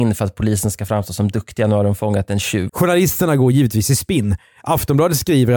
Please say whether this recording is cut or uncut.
cut